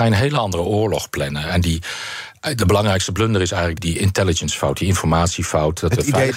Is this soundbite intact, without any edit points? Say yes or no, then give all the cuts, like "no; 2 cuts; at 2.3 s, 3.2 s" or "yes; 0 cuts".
no; 1 cut; at 3.8 s